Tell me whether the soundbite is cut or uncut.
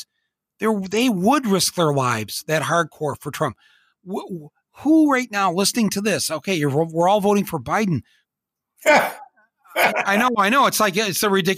cut